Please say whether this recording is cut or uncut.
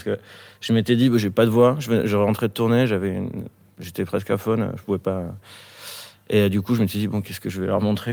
uncut